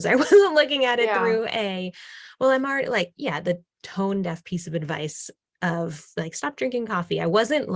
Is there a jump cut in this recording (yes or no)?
no